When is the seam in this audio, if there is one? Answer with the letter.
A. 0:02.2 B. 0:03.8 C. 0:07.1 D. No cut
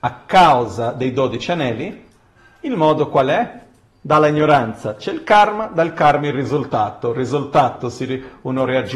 D